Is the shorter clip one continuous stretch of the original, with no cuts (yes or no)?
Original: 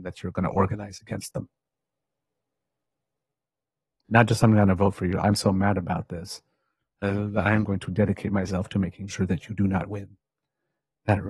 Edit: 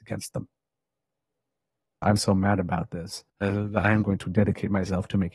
no